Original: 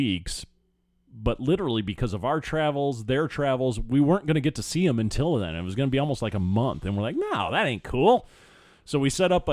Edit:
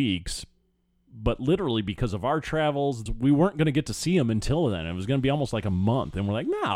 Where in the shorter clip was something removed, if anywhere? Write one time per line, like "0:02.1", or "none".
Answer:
0:03.1